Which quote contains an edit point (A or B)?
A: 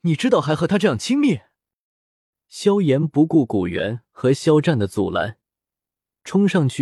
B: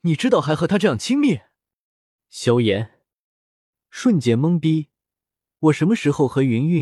B